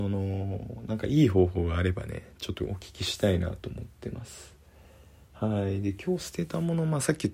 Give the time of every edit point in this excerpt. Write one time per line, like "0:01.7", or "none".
none